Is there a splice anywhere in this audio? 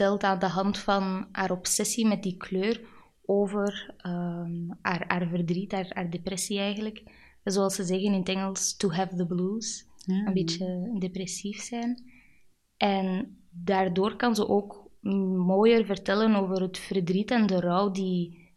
no; 0 cuts

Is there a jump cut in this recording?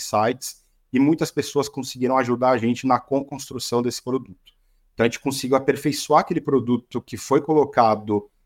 yes; 1 cut; at 4.9 s

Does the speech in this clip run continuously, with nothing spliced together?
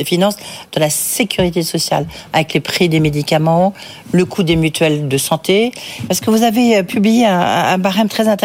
no; 1 cut; at 6.1 s

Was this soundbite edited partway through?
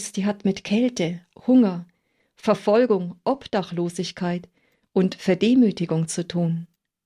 yes; 1 cut; at 1.3 s

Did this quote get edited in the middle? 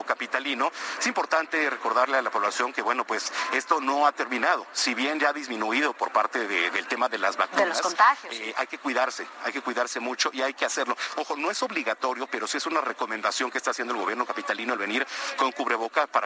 no; 0 cuts

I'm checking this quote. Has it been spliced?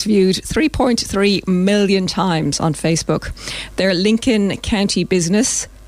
no; 0 cuts

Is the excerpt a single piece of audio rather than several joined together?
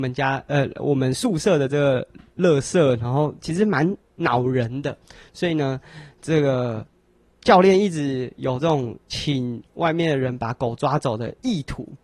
yes; 0 cuts

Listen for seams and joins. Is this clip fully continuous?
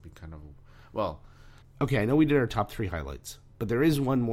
no; 1 cut; at 1.6 s

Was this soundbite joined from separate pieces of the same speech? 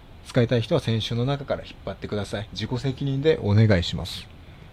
yes; 1 cut; at 2.5 s

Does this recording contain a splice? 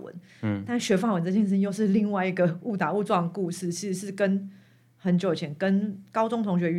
no; 0 cuts

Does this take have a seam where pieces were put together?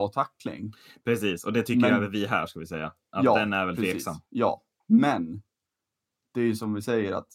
yes; 1 cut; at 4.3 s

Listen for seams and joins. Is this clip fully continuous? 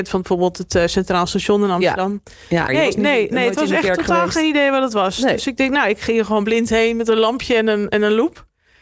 no; 1 cut; at 2.7 s

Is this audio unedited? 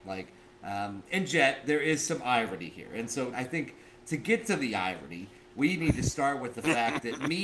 no; 1 cut; at 3.3 s

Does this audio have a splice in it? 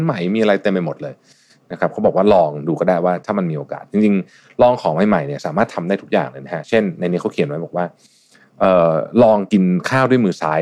no; 0 cuts

